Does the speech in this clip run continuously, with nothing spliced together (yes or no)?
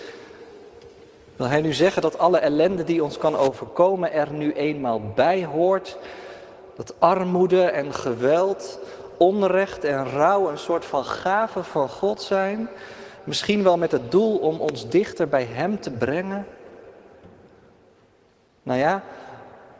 yes